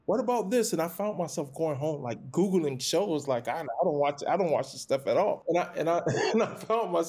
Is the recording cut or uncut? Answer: uncut